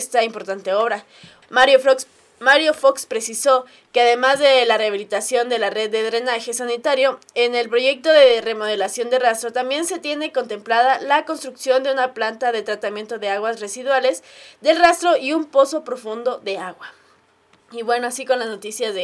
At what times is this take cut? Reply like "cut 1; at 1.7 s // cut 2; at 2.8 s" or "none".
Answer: cut 1; at 1.4 s